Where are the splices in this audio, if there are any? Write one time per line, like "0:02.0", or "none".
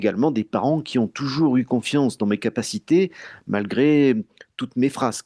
none